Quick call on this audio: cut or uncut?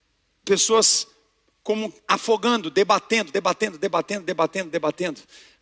uncut